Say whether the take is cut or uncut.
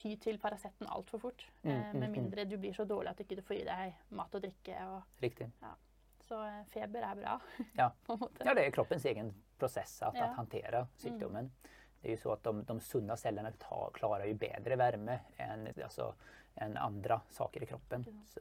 cut